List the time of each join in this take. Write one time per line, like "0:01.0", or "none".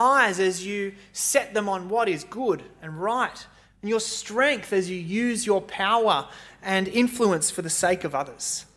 none